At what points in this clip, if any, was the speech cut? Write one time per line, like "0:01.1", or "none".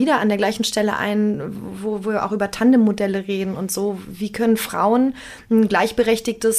none